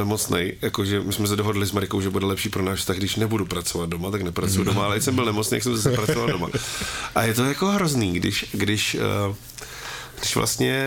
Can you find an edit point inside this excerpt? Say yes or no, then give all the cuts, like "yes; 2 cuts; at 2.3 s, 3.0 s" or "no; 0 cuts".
no; 0 cuts